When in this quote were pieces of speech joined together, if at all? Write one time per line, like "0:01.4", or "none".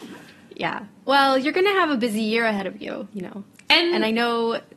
0:03.1